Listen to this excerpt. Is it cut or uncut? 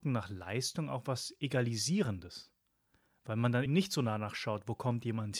cut